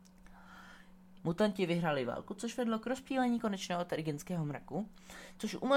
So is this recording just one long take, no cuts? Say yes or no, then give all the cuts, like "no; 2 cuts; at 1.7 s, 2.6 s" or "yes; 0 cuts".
no; 1 cut; at 1.2 s